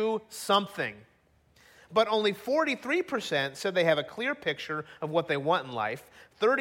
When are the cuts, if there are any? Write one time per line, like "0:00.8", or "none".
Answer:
0:01.7